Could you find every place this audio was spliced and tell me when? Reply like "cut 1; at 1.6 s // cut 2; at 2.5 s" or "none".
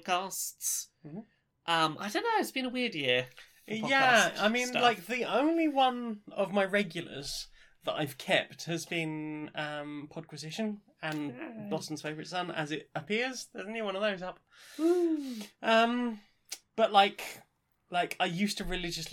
none